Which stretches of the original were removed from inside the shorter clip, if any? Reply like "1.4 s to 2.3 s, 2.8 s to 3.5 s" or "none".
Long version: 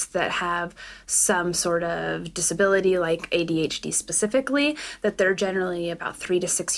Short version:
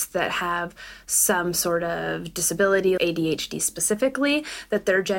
3.0 s to 3.3 s